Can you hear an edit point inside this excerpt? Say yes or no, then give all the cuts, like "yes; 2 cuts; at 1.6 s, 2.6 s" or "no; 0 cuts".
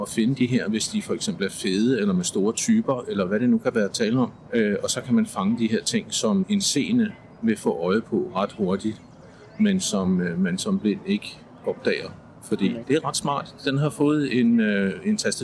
yes; 1 cut; at 12.8 s